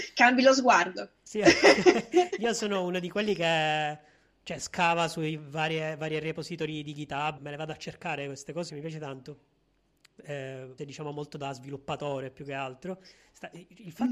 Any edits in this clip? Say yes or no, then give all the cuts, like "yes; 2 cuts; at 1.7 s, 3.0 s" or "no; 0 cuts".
yes; 3 cuts; at 7.4 s, 8.7 s, 10.8 s